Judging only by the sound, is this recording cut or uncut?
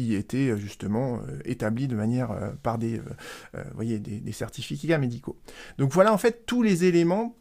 uncut